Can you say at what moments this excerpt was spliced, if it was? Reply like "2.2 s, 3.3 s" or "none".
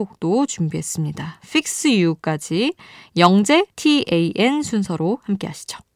3.7 s